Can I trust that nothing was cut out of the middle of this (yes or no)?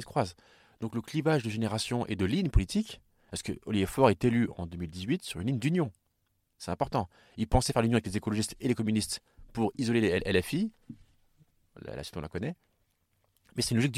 yes